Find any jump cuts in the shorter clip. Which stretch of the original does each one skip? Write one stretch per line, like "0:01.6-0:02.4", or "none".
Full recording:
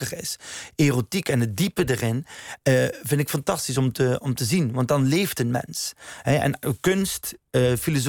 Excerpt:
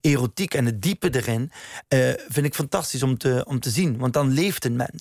none